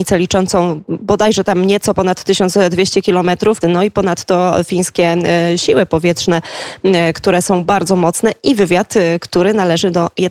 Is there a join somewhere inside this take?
yes; 1 cut; at 3.6 s

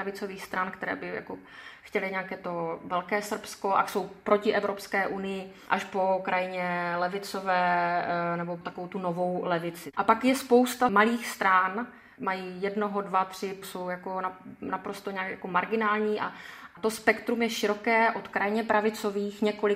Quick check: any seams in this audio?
yes; 2 cuts; at 9.9 s, 13.6 s

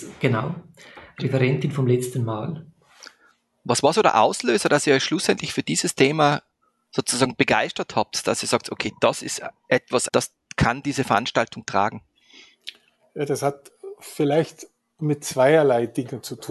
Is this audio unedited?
no; 1 cut; at 10.1 s

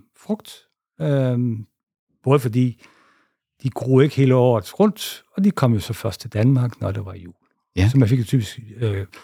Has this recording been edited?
no; 0 cuts

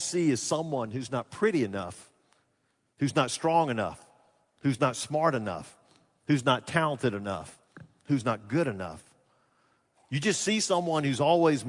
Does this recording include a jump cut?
no; 0 cuts

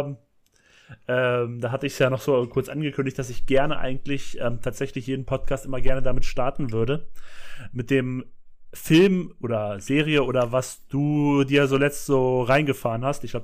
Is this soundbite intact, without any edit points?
yes; 0 cuts

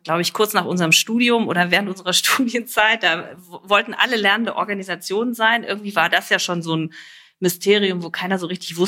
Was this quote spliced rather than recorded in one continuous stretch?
no; 0 cuts

